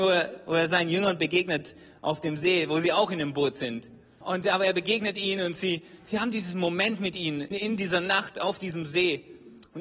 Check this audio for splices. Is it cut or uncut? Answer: cut